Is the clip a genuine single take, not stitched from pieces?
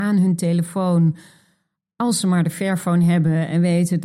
yes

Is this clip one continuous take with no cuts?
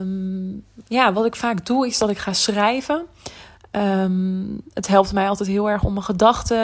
yes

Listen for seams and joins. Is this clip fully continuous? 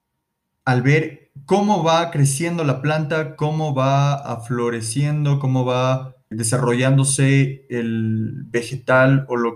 no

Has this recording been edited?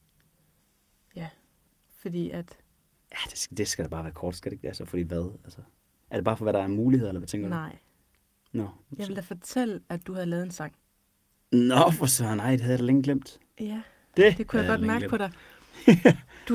no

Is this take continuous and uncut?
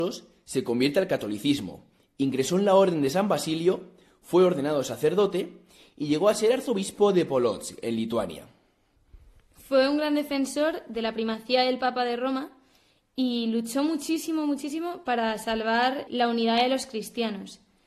no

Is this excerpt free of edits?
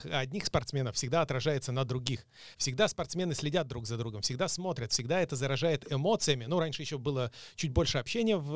yes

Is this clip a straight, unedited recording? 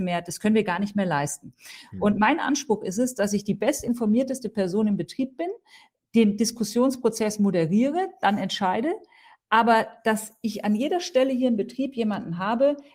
yes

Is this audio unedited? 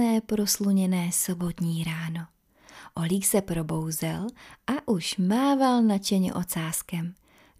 yes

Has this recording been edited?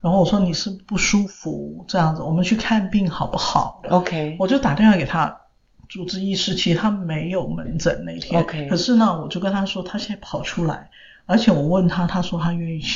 yes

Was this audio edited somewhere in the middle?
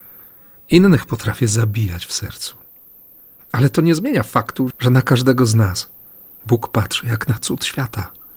yes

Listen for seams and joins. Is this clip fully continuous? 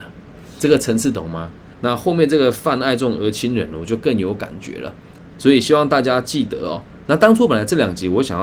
no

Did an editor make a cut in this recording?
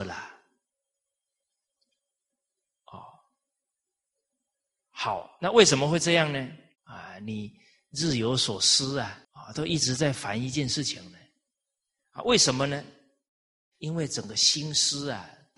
yes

